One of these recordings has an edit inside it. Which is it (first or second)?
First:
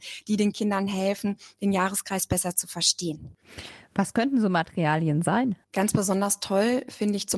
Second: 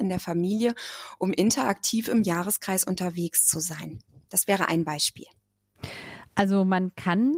first